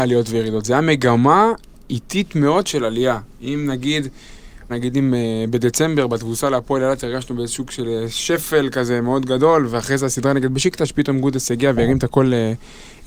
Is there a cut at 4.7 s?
yes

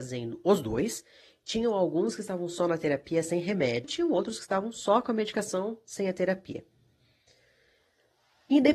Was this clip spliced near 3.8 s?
yes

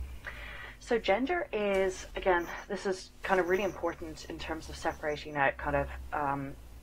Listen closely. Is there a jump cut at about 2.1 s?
yes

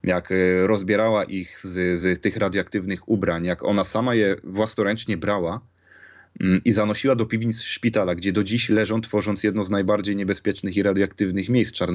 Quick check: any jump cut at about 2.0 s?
no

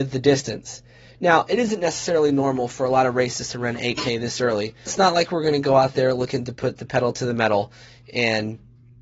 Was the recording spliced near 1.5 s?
no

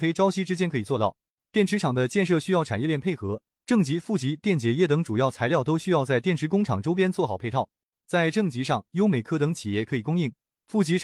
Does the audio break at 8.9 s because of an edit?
yes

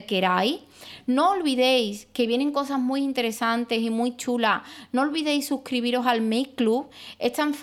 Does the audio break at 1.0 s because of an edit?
no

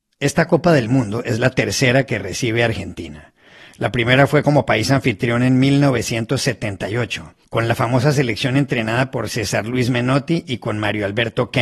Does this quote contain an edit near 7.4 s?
yes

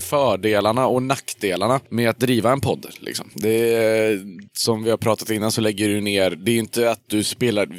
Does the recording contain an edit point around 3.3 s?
yes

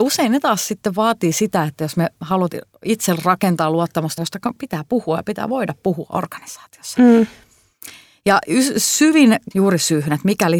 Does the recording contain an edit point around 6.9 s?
no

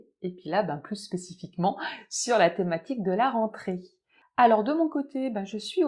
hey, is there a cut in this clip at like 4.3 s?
no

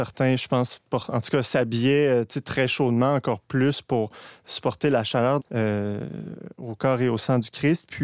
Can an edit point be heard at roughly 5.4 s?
yes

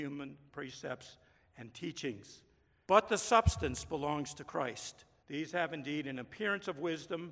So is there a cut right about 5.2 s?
yes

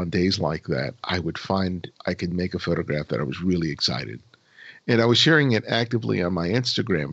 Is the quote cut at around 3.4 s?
no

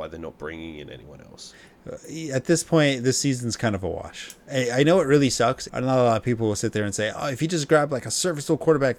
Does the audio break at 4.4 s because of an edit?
no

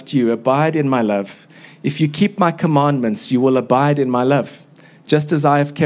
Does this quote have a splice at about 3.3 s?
no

